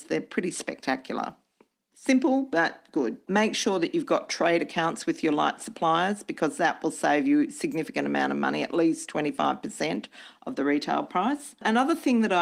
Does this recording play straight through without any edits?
no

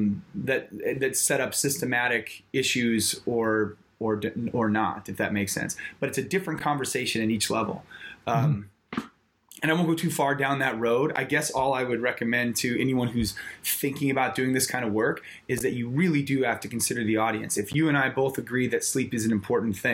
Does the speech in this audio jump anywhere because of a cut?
no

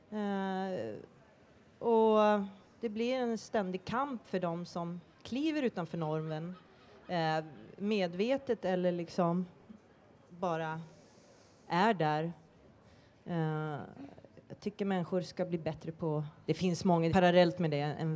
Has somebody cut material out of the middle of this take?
yes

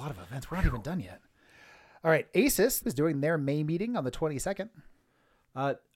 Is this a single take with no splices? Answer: no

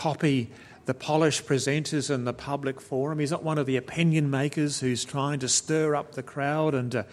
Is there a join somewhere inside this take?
no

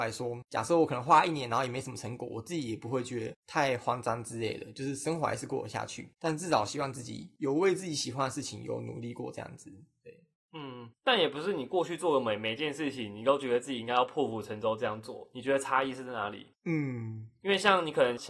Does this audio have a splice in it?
no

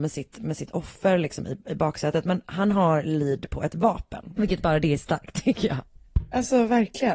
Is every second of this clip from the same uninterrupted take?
no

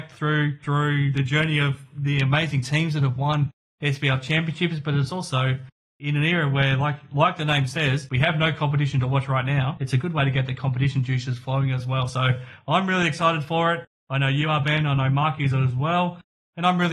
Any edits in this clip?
no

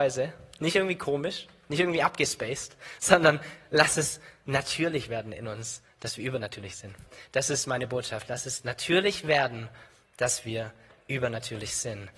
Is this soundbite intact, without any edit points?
yes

